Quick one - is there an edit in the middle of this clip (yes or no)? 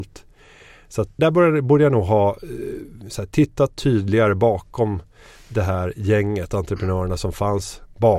yes